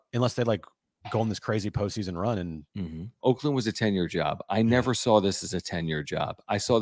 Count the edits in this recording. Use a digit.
1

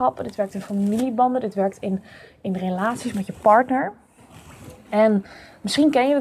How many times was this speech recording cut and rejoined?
0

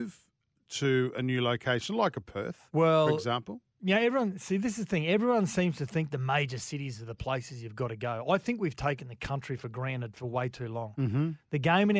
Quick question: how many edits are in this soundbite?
0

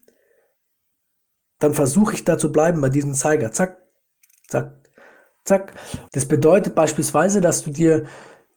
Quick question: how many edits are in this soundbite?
1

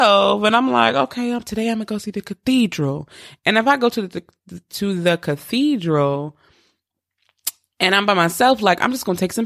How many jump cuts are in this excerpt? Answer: 0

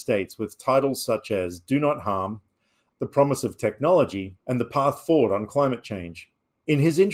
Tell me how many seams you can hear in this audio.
2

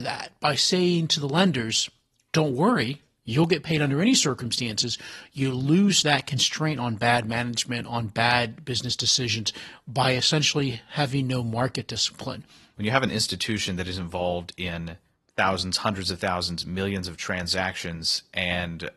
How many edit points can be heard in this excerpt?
1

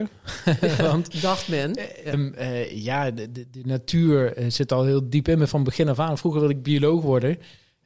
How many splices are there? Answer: 1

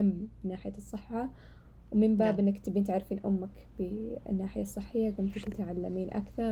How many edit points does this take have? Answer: 0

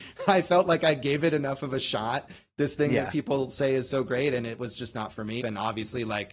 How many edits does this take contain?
1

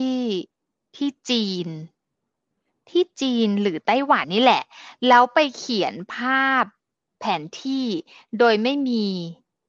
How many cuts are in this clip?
1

